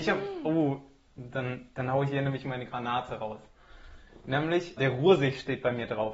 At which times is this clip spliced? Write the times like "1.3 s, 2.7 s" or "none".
4.8 s